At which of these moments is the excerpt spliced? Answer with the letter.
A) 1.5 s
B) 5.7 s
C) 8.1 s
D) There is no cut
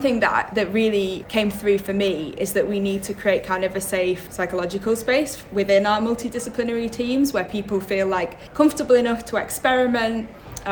D